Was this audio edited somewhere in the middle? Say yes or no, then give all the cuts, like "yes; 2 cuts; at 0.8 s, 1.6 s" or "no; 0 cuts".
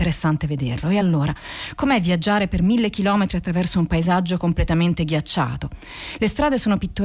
no; 0 cuts